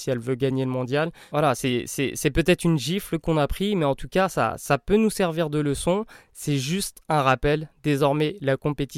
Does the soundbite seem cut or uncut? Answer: uncut